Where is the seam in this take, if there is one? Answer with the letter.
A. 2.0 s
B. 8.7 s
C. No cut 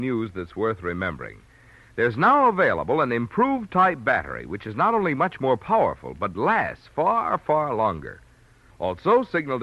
B